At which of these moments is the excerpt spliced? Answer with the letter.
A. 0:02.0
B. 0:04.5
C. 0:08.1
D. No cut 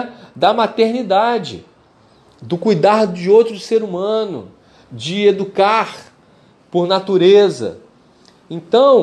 D